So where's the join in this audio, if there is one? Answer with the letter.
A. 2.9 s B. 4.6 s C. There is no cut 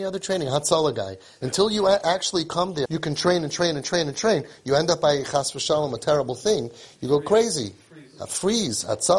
A